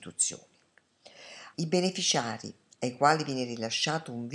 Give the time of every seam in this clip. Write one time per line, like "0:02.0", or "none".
0:01.5